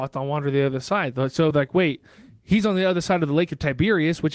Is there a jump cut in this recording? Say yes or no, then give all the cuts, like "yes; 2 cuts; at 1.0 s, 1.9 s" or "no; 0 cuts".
no; 0 cuts